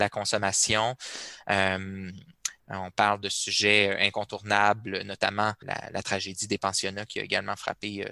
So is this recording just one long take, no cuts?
no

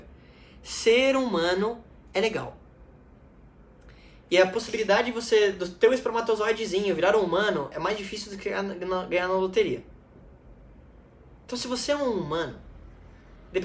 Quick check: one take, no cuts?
no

